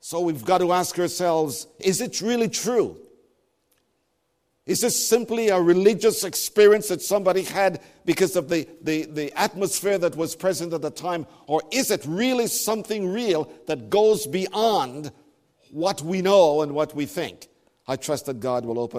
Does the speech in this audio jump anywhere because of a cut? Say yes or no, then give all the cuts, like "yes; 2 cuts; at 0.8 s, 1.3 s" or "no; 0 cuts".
no; 0 cuts